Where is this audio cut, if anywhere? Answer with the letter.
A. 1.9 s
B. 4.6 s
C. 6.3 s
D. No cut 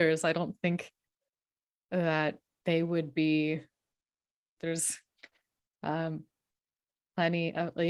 B